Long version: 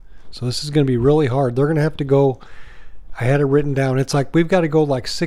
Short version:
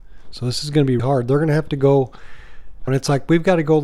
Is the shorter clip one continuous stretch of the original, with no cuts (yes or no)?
no